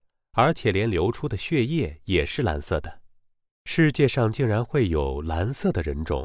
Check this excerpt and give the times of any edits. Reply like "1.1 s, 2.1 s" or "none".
3.5 s